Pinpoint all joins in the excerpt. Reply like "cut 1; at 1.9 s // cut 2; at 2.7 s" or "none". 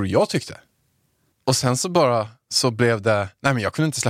cut 1; at 1.3 s